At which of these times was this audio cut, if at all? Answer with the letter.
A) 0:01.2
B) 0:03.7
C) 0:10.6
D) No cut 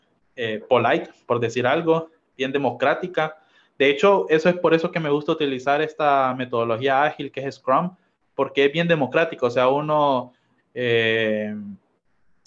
C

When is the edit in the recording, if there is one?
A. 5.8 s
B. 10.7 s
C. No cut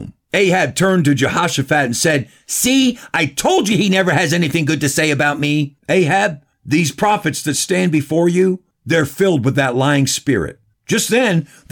A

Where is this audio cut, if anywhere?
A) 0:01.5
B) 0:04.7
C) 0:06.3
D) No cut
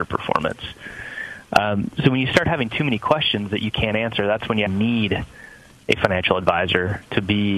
B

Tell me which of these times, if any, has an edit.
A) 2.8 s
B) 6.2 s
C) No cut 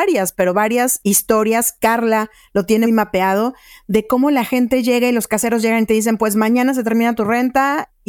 A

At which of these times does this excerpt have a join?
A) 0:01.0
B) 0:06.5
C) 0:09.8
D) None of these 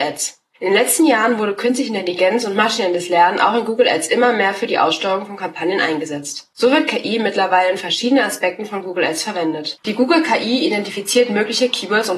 C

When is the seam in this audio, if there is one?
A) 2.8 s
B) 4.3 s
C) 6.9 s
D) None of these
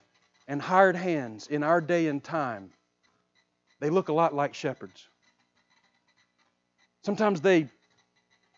C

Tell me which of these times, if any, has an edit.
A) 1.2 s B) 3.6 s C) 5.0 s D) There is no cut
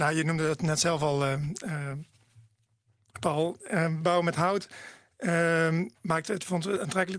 D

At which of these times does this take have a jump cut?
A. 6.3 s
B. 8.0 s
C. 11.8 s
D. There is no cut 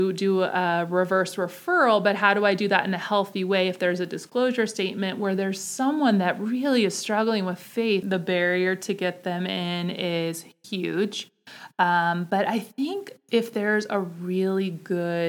B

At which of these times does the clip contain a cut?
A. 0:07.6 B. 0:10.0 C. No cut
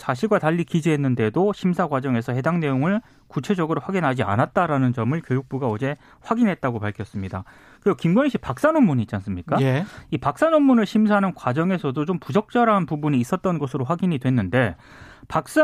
C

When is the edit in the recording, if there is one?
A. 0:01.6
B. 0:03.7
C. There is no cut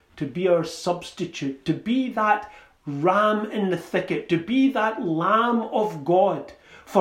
C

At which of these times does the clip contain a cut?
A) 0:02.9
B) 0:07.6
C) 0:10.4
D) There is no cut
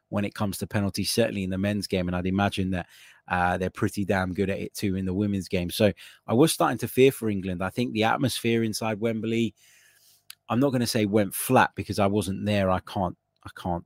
D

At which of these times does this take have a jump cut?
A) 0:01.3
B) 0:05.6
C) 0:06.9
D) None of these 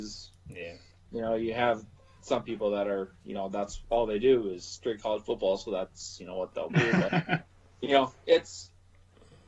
D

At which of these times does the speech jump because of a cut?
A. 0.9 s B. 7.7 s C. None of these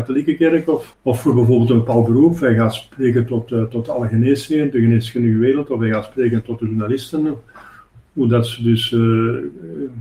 A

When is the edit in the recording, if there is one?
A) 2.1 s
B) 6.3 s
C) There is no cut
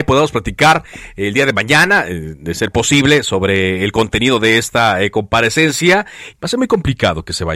B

